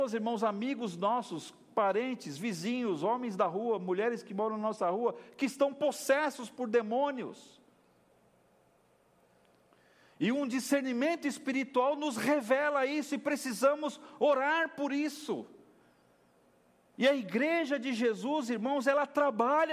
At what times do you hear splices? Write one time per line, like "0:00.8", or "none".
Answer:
none